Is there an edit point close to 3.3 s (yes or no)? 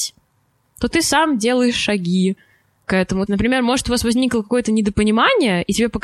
yes